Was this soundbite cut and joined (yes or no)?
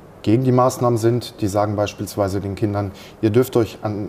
no